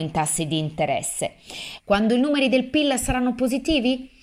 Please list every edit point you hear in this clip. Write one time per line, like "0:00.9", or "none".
0:01.8